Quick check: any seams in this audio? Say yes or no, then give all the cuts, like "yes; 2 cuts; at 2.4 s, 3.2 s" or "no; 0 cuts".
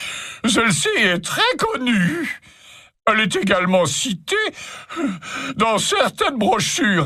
no; 0 cuts